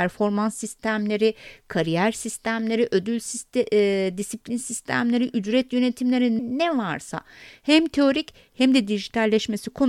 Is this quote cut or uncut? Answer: cut